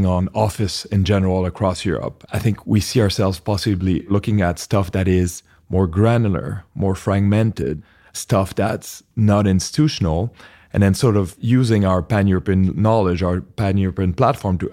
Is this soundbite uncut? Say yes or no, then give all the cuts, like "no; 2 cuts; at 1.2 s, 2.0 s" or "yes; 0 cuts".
no; 1 cut; at 2.3 s